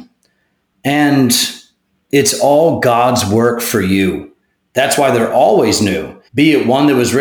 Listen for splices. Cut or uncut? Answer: cut